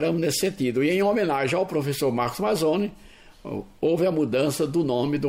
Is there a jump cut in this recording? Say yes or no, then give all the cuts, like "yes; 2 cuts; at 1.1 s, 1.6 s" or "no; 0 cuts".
no; 0 cuts